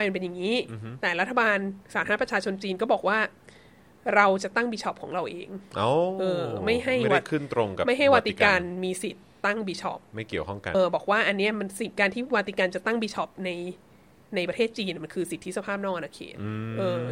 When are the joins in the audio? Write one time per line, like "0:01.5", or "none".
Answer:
0:10.7